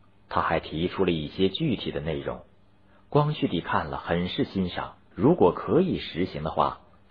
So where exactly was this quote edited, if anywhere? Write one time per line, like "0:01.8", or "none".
0:05.1